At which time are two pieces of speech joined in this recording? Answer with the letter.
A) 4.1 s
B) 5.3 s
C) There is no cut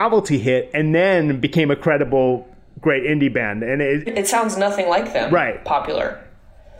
A